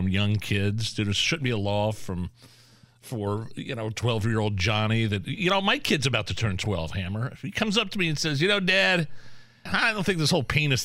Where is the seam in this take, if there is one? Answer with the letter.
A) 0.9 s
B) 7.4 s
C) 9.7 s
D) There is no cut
C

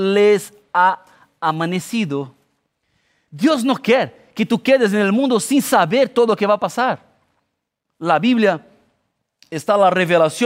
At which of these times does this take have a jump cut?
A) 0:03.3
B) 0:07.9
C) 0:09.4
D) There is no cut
A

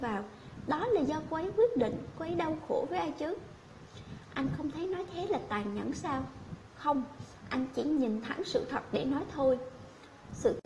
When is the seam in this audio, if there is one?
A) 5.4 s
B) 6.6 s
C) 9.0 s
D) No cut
D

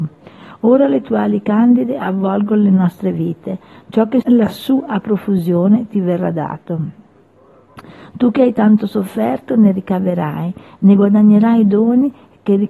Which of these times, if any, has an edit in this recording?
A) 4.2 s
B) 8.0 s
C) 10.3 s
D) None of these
A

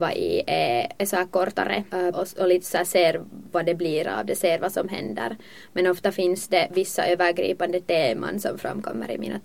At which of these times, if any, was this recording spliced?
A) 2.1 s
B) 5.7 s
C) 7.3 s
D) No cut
A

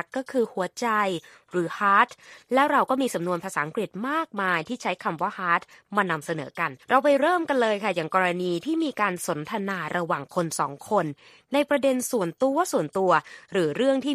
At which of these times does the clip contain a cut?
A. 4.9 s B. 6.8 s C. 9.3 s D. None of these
B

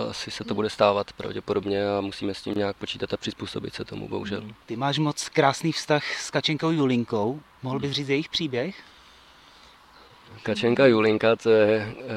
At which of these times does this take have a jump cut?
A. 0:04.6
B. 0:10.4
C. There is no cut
A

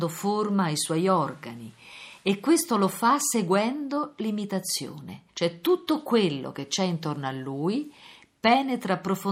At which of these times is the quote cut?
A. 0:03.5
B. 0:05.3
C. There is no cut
B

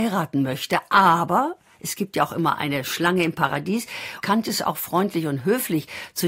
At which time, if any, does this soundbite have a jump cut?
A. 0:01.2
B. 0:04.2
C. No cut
B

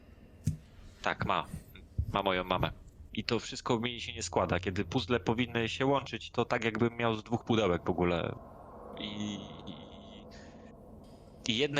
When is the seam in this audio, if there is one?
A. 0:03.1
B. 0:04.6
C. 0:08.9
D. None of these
A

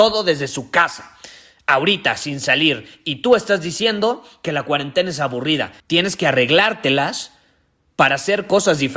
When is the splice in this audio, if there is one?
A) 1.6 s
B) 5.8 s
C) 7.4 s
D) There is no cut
B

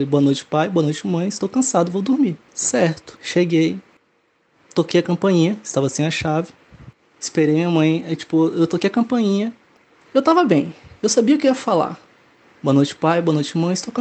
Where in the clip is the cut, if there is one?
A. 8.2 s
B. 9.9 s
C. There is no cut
B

